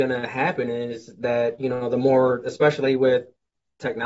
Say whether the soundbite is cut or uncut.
uncut